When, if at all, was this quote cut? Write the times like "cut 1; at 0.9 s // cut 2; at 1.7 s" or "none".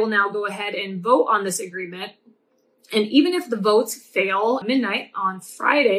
cut 1; at 4.6 s